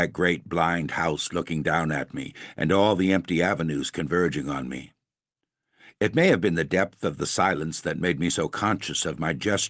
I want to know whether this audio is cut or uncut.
uncut